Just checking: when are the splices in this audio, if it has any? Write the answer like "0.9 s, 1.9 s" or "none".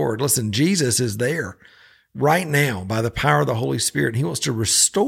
none